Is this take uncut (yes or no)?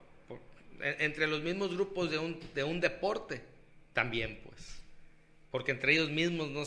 yes